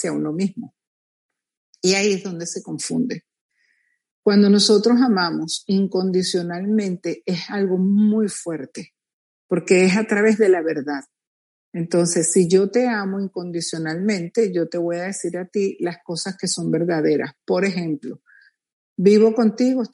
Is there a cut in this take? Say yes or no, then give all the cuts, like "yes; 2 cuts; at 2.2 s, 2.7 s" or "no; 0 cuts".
no; 0 cuts